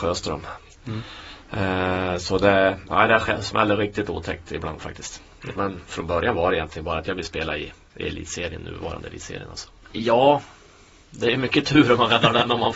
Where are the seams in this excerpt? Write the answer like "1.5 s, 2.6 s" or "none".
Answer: 5.6 s, 9.8 s